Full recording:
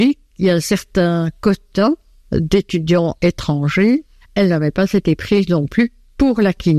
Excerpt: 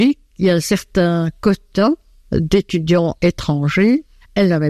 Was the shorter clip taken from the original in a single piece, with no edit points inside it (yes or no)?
yes